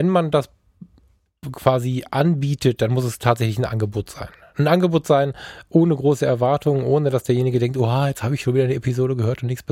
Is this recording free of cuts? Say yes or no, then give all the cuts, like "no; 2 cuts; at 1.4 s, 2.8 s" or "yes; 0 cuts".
yes; 0 cuts